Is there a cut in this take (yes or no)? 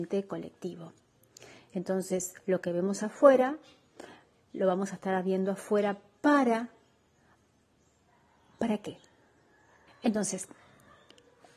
yes